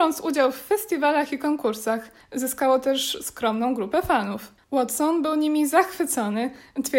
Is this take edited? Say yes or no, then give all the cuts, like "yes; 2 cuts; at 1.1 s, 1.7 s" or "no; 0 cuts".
yes; 1 cut; at 4.6 s